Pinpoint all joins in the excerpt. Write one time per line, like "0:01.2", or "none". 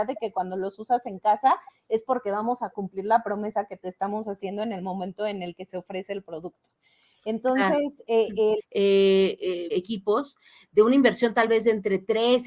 0:08.6
0:09.7